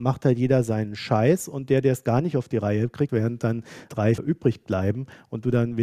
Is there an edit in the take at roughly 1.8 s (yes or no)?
no